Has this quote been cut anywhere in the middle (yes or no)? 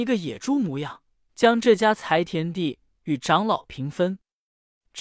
yes